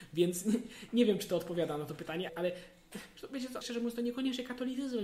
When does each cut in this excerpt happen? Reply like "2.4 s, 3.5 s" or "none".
2.3 s, 3.6 s